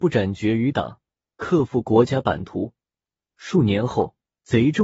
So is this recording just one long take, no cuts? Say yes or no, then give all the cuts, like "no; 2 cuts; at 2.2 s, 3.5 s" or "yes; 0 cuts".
yes; 0 cuts